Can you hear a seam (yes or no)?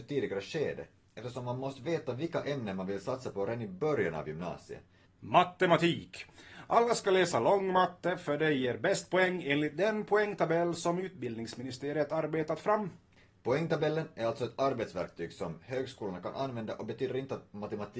yes